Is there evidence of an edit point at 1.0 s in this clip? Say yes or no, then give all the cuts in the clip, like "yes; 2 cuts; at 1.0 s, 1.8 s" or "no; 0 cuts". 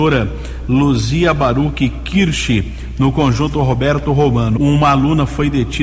no; 1 cut; at 4.6 s